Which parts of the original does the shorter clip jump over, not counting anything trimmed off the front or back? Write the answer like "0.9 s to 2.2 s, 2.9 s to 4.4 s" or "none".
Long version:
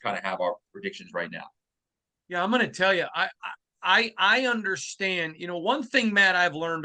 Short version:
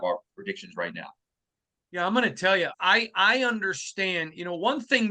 3.1 s to 3.8 s

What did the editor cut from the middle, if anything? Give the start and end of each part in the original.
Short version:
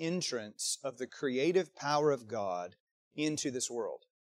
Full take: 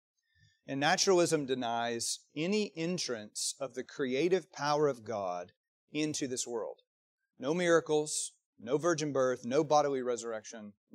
none

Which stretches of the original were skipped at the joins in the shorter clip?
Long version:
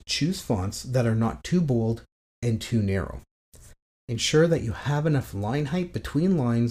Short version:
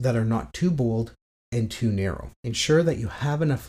3.2 s to 4.0 s

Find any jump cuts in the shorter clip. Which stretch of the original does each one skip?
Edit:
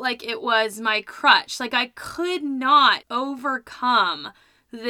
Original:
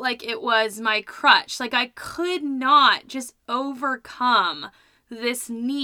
3.0 s to 3.4 s

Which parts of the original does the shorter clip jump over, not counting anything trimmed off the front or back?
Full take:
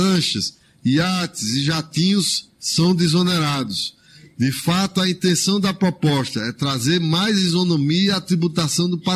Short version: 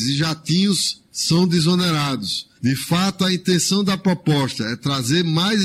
4.0 s to 4.3 s

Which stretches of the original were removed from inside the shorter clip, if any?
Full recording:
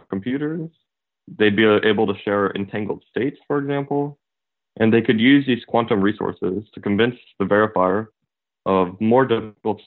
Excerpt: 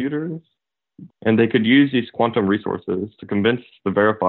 1.4 s to 4.6 s

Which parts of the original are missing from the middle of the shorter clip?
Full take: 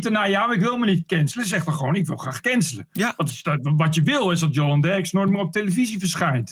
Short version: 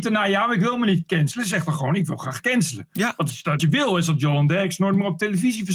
3.6 s to 3.9 s

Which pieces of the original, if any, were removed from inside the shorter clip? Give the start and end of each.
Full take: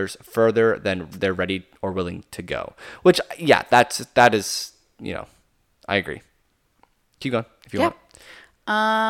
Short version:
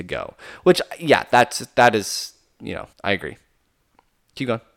5.3 s to 5.8 s

